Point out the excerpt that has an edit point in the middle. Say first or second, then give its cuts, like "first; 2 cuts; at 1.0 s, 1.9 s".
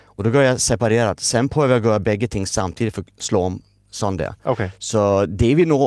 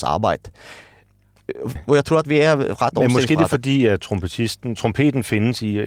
second; 1 cut; at 1.7 s